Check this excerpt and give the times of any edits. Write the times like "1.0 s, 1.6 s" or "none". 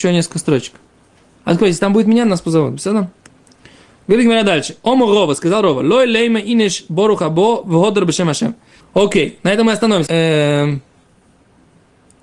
8.8 s, 10.1 s